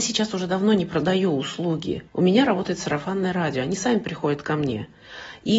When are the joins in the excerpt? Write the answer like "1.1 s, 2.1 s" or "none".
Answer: 2.1 s